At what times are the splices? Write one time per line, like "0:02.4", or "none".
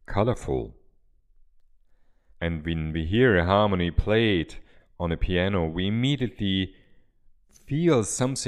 0:02.3